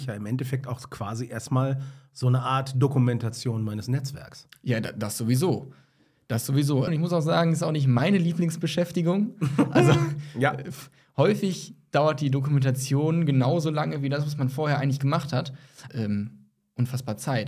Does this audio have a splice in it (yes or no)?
yes